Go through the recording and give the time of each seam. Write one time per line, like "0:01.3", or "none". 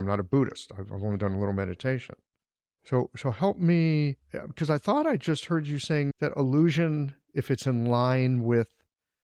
0:04.2
0:06.1